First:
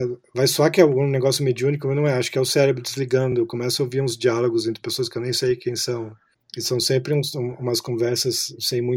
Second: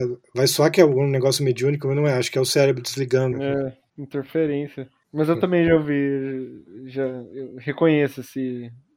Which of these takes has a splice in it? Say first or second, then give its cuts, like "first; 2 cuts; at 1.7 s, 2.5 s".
second; 1 cut; at 3.3 s